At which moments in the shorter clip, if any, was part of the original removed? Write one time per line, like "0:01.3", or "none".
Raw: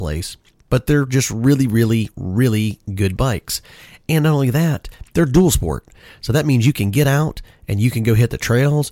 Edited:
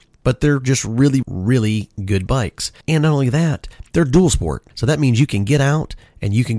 0:01.2
0:02.8
0:04.7